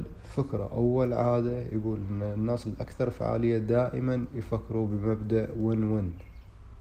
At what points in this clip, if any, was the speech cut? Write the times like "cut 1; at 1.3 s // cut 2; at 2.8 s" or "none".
none